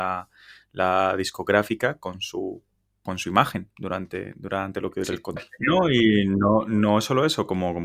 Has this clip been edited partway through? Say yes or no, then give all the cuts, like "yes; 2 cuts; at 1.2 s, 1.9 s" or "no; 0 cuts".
yes; 1 cut; at 5.4 s